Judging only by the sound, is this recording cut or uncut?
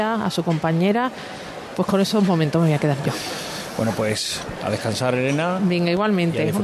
uncut